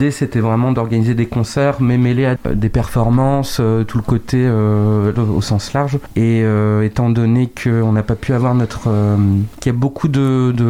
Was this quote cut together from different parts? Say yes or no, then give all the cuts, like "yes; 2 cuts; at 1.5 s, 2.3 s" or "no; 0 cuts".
yes; 2 cuts; at 5.1 s, 9.5 s